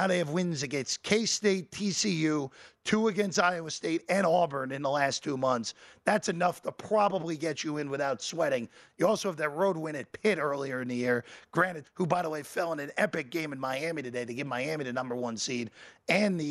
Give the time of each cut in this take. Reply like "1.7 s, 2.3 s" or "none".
11.8 s